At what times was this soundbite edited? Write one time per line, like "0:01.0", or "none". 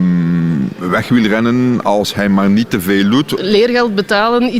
0:03.4